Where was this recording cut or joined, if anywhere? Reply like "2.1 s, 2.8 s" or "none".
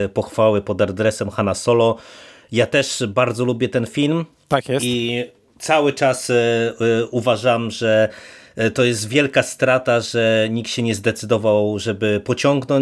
none